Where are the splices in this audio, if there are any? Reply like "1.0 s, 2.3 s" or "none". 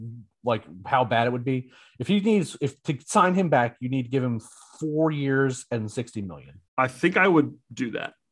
6.7 s

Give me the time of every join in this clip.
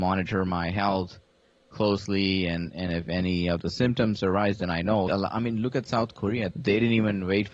5.1 s, 6.5 s

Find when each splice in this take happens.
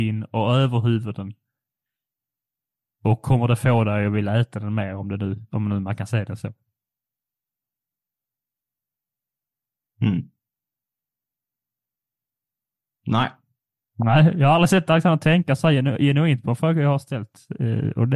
none

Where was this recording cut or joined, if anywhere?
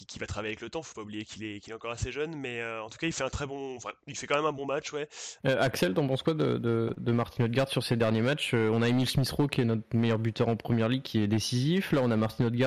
5.4 s

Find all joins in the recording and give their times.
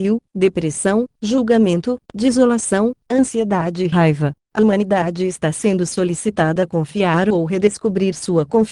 4.4 s

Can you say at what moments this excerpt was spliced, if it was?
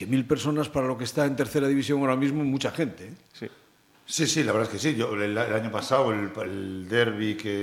none

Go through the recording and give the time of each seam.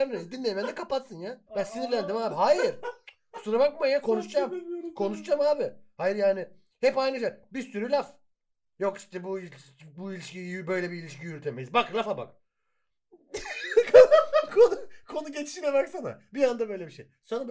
1.5 s

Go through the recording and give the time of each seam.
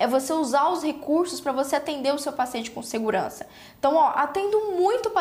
none

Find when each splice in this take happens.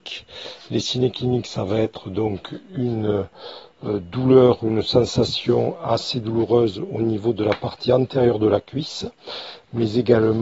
none

